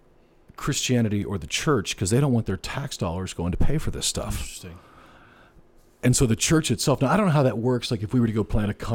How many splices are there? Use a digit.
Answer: 0